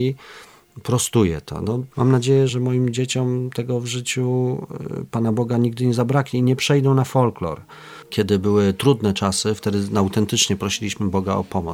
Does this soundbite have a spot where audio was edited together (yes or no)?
yes